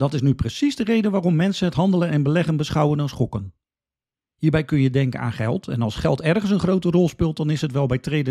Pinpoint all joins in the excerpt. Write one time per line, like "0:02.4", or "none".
0:04.1